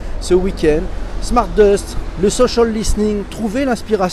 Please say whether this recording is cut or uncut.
uncut